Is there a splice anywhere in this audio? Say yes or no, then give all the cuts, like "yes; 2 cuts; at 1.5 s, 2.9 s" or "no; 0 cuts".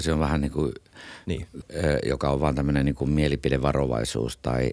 yes; 1 cut; at 1.6 s